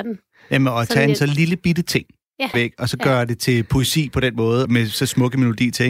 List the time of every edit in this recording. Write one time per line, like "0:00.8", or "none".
0:02.5
0:04.6